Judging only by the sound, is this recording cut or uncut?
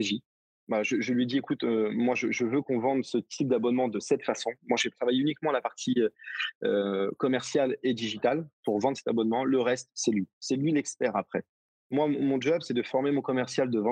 uncut